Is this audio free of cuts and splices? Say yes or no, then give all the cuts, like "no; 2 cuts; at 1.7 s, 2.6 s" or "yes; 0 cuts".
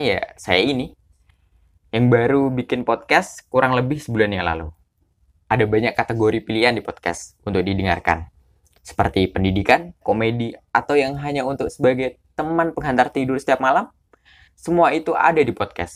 no; 1 cut; at 10.0 s